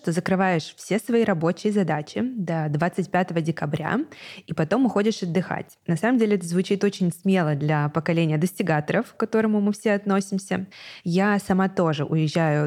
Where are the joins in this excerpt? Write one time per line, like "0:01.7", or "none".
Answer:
none